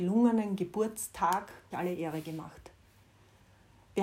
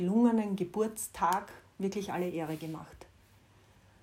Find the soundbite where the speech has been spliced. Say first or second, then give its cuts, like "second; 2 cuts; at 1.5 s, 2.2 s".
first; 1 cut; at 1.7 s